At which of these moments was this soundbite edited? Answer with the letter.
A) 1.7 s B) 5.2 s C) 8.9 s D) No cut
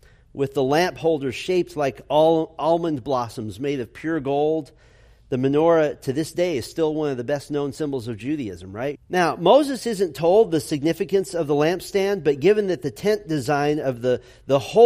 C